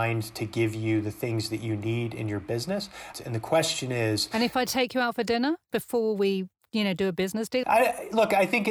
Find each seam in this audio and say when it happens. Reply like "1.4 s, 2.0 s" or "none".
3.1 s, 7.6 s